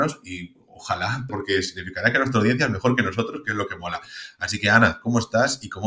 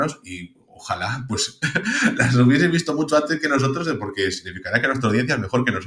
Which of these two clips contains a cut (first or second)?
first